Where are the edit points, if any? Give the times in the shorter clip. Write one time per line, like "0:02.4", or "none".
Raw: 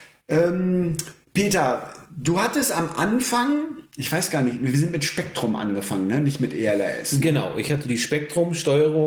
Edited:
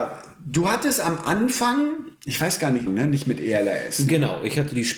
0:02.9